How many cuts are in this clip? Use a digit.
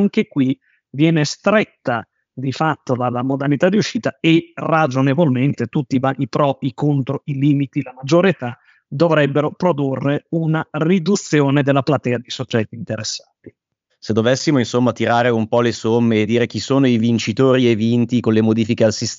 1